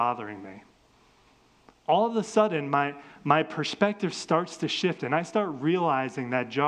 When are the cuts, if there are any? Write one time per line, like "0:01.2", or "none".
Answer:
none